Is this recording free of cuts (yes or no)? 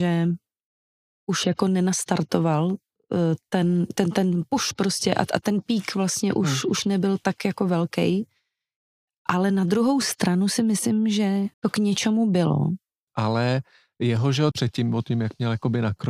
no